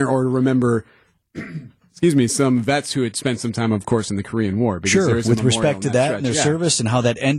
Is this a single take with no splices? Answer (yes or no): yes